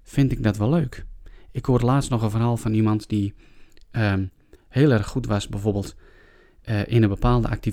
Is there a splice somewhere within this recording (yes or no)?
no